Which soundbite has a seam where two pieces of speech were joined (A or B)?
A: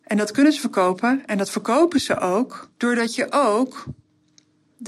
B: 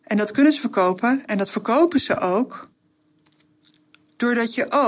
A